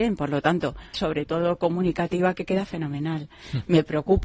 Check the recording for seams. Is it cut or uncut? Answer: cut